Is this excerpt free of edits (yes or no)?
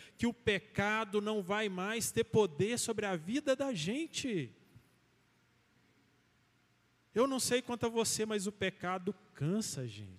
yes